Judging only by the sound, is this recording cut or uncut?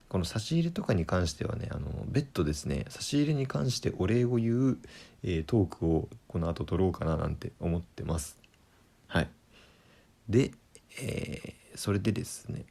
uncut